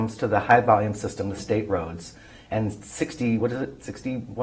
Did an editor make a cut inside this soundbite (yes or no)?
no